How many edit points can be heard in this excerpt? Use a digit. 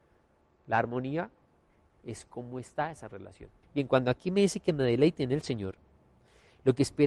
1